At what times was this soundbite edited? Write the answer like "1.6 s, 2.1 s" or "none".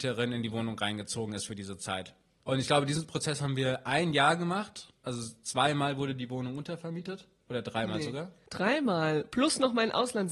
none